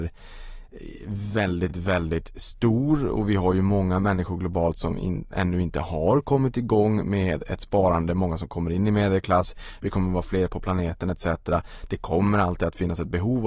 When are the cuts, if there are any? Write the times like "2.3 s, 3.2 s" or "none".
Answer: none